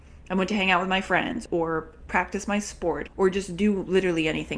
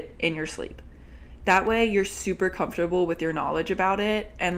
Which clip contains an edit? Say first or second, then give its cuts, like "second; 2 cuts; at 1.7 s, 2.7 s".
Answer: first; 2 cuts; at 1.5 s, 3.1 s